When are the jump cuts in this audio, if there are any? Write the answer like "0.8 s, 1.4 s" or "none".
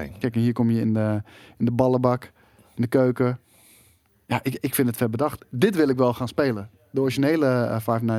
none